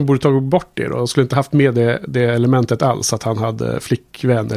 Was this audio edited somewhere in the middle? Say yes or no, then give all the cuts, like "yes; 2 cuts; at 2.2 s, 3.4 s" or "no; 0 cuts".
no; 0 cuts